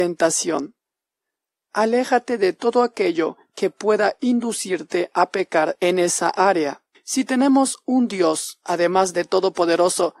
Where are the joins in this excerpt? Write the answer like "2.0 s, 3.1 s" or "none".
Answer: 6.9 s

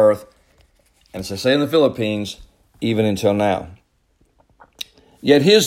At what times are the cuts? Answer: none

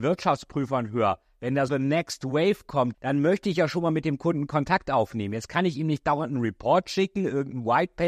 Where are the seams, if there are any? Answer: 1.7 s, 2.9 s

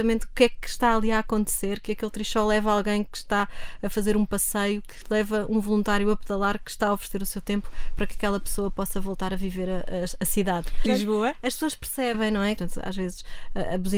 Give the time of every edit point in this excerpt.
10.9 s, 12.6 s

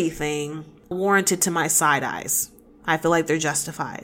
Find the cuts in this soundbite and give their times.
0.9 s

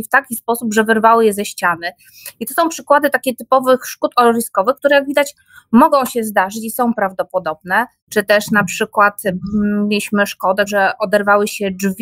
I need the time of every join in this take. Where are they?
8.0 s, 10.7 s

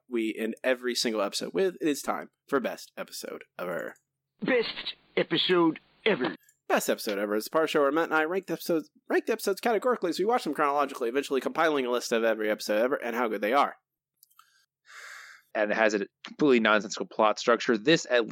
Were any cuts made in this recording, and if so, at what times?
15.5 s

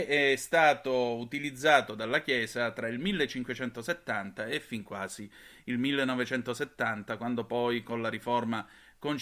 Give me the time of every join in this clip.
none

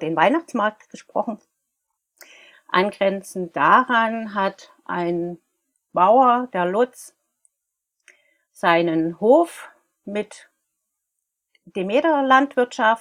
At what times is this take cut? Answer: 2.5 s

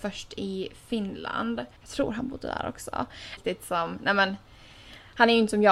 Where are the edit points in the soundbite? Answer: 1.8 s, 3.4 s

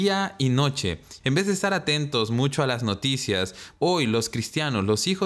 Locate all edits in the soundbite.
1.2 s, 3.7 s

